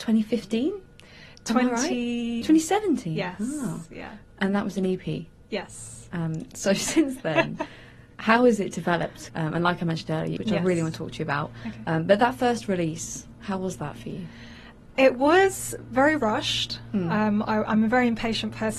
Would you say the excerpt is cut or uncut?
cut